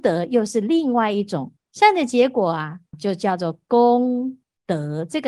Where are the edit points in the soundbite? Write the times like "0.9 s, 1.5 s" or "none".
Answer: 1.6 s, 2.9 s